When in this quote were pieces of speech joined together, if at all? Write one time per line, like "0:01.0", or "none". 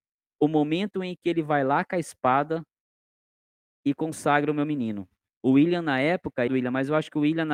0:05.3
0:06.5